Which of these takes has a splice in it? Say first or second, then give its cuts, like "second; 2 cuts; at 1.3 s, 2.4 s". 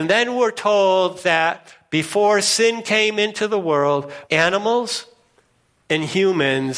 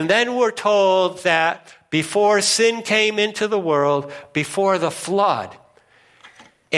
first; 1 cut; at 4.2 s